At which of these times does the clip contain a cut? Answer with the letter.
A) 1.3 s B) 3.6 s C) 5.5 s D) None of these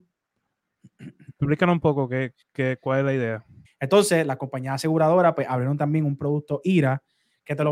B